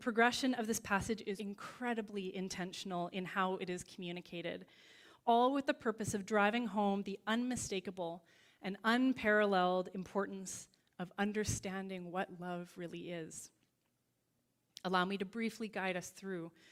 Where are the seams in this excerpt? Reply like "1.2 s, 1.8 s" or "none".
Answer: 1.4 s